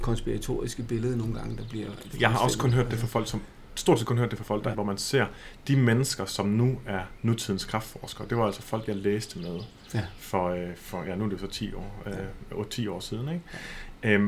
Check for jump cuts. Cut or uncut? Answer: cut